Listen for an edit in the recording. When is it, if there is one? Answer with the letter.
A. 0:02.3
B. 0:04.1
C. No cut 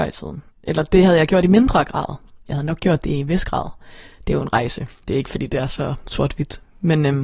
C